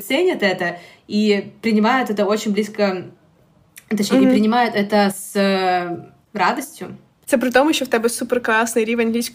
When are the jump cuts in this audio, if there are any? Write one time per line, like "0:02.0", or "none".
none